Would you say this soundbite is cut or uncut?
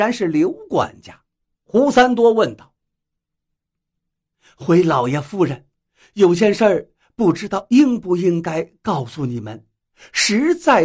cut